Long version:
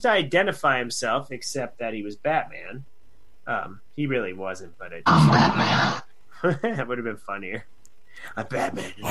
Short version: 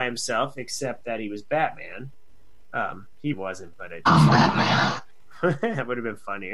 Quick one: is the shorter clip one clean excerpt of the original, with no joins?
no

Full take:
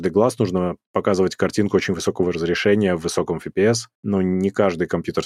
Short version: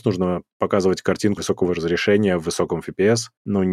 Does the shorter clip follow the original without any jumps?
no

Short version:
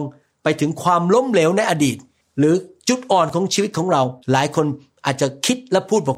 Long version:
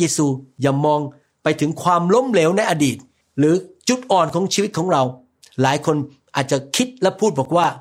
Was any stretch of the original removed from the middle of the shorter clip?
yes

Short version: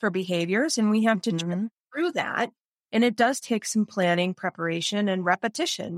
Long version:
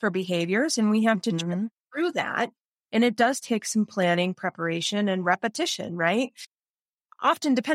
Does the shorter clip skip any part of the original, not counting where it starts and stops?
no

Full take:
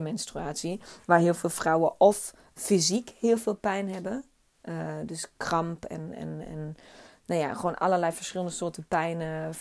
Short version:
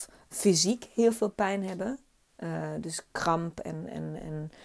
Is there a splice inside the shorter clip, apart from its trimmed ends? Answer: no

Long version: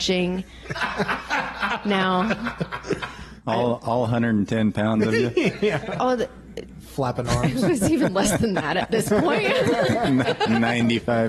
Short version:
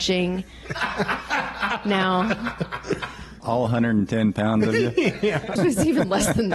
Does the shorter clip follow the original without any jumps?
no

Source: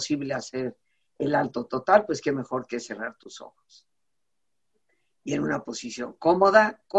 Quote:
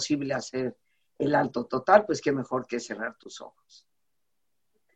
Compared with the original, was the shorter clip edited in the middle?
no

